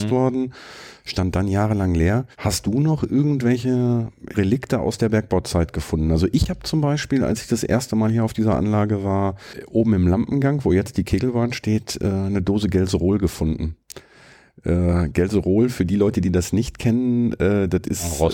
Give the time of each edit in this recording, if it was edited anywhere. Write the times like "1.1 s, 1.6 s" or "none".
2.3 s, 4.3 s